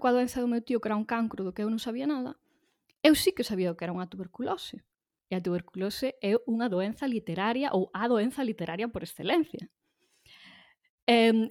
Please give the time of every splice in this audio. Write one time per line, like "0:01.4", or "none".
0:05.2